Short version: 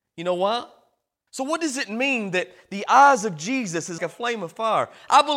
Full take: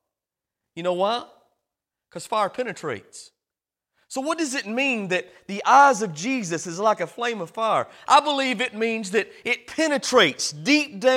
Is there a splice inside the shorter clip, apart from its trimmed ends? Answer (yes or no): yes